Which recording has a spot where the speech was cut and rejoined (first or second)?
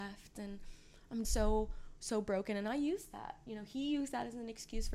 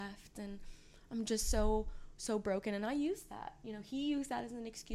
first